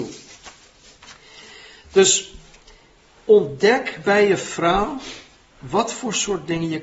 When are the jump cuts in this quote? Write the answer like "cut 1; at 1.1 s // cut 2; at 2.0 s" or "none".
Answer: none